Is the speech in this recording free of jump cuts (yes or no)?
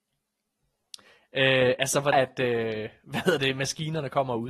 no